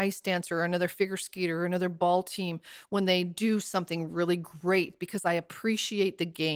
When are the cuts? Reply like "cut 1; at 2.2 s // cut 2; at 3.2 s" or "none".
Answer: none